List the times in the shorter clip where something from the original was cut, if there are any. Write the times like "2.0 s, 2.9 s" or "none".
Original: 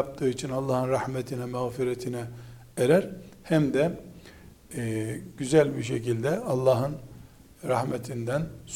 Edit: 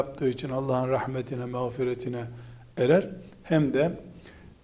none